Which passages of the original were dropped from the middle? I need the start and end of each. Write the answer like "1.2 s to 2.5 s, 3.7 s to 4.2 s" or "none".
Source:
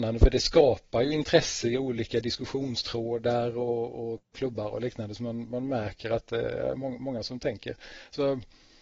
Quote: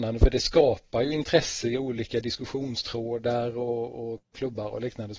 none